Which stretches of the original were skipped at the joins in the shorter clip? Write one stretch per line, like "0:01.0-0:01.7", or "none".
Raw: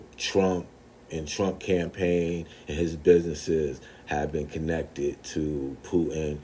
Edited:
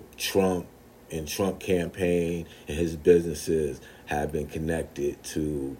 none